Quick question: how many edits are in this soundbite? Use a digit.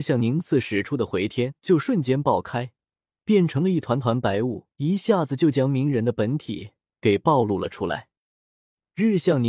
2